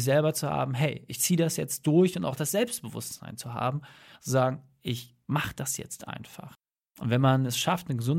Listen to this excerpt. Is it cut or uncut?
uncut